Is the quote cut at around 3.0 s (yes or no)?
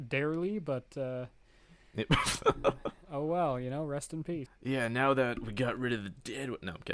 no